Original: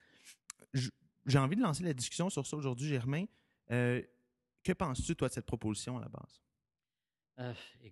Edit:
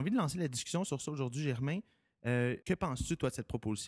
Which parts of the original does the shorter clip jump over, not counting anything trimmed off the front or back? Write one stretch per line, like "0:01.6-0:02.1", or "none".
0:04.1-0:04.6